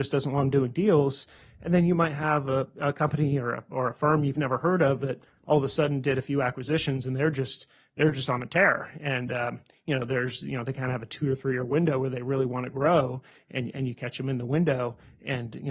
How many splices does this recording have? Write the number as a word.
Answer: zero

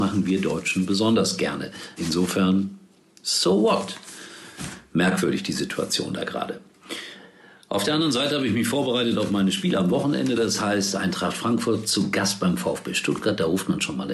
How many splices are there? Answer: one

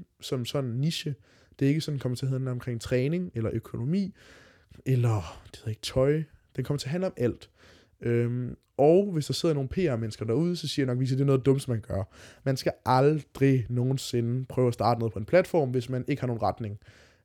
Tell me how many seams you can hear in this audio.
one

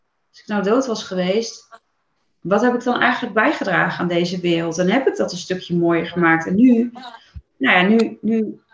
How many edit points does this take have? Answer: zero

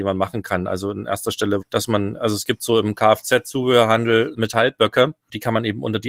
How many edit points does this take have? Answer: two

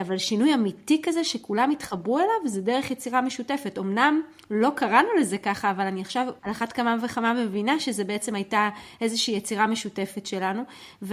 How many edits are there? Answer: one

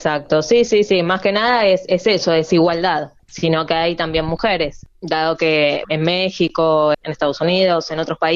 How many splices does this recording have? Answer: three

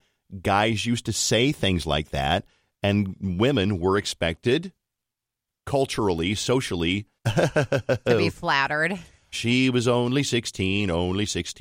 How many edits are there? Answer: two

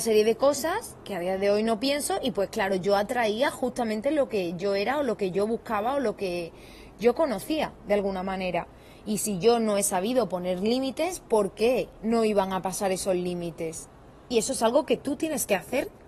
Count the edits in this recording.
one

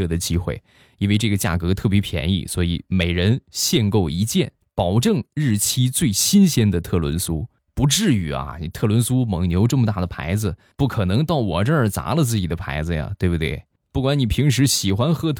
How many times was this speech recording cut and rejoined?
one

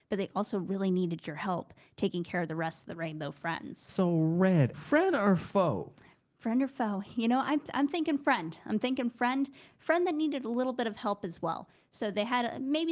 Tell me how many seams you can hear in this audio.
one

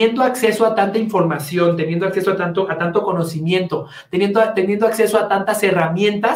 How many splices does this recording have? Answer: zero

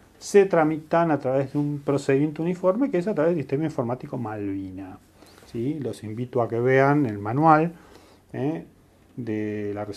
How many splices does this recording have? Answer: zero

